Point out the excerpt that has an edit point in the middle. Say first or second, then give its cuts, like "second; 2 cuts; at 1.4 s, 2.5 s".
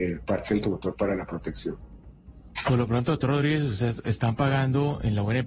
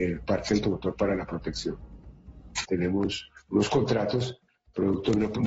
second; 1 cut; at 2.6 s